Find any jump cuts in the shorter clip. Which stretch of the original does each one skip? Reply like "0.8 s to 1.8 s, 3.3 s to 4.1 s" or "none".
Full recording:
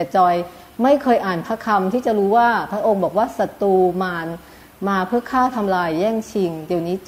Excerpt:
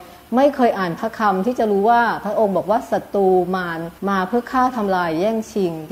4.5 s to 4.8 s